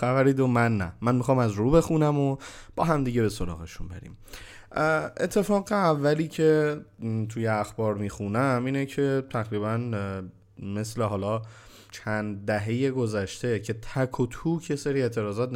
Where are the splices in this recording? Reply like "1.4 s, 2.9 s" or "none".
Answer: 11.9 s